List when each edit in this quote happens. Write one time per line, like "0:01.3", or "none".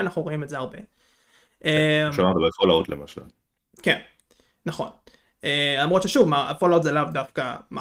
none